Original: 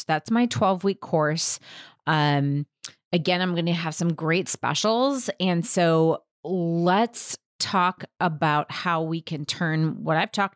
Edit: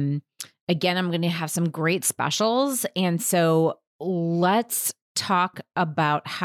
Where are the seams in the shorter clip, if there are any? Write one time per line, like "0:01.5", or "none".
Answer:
none